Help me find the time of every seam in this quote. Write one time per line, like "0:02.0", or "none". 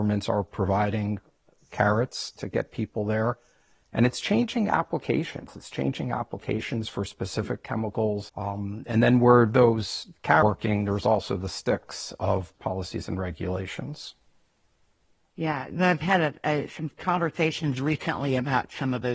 0:08.3
0:12.5